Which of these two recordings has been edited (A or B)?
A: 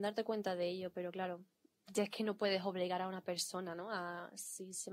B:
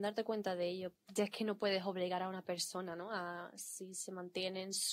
B